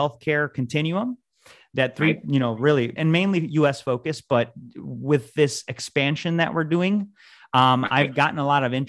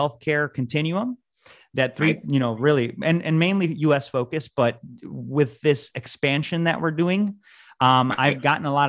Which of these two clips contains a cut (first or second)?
first